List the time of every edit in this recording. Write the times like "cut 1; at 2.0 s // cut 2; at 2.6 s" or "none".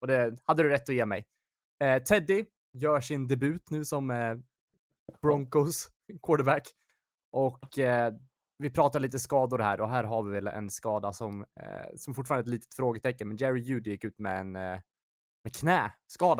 none